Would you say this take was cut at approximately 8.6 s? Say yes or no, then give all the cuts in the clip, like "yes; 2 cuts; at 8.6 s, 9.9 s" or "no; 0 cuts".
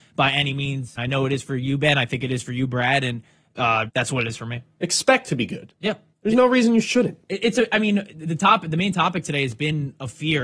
no; 3 cuts; at 1.0 s, 3.9 s, 6.1 s